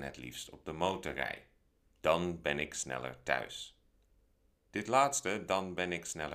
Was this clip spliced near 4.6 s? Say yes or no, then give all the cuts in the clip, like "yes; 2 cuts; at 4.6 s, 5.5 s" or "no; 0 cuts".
no; 0 cuts